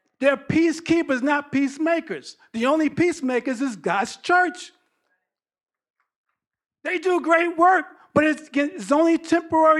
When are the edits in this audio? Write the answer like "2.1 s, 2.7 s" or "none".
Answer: none